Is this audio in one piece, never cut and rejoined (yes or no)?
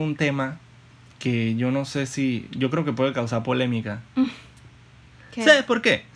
yes